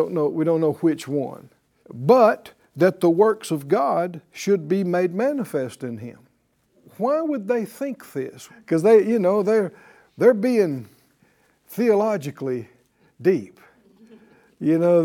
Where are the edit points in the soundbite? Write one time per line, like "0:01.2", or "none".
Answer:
0:01.8
0:08.5